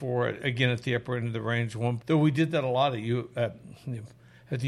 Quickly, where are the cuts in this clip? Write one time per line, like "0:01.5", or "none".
0:02.0